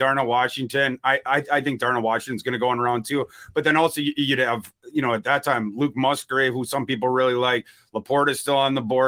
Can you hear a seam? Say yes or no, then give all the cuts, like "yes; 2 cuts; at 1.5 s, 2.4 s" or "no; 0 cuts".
no; 0 cuts